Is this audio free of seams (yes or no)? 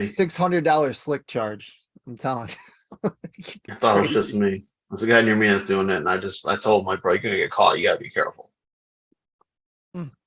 yes